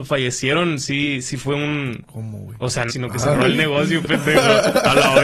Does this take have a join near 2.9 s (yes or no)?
yes